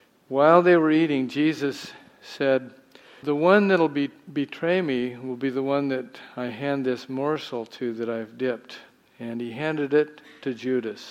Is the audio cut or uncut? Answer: cut